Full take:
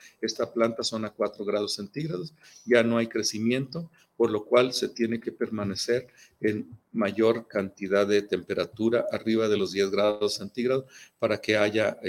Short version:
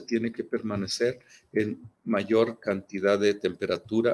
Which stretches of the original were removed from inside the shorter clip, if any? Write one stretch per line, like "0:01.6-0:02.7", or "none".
none